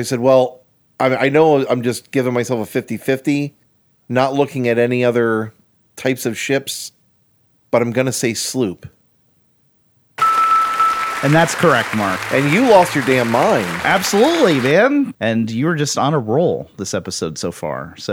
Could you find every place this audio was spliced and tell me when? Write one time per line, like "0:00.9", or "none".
0:15.1